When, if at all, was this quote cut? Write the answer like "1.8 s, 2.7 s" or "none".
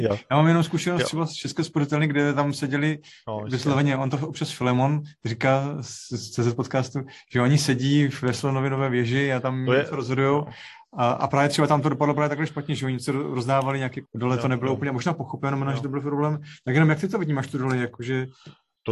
14.0 s

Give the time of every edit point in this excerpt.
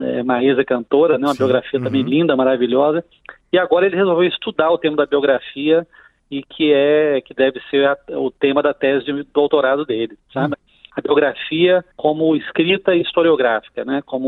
10.5 s, 11.9 s

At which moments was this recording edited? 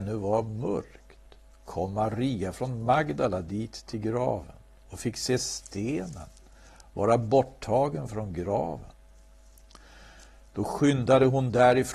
none

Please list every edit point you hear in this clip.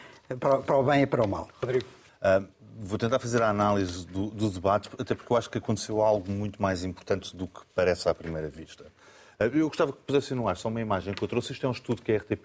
2.1 s

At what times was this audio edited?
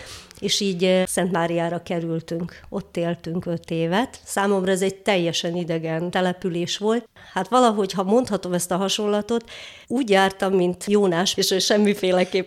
9.8 s, 11.3 s

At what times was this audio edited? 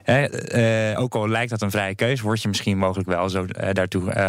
none

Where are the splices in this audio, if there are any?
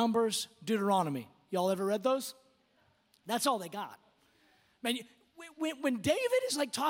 none

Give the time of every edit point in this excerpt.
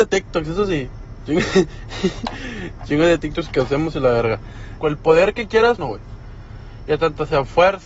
4.8 s, 5.8 s

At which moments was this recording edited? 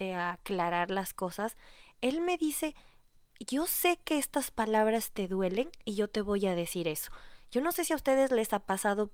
none

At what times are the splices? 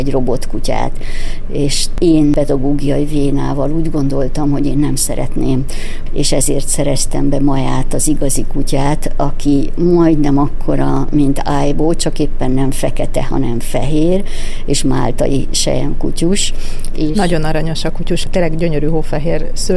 6.1 s

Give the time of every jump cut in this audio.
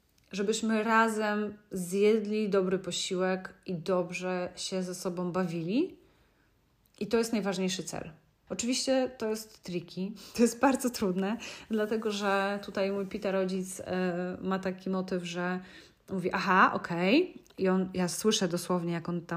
8.5 s

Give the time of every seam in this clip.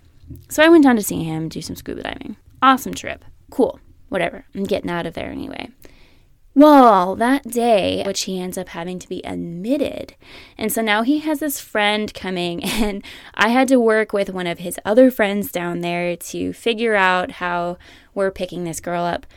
3.4 s, 8.0 s

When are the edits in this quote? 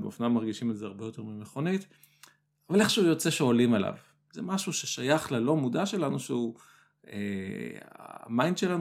none

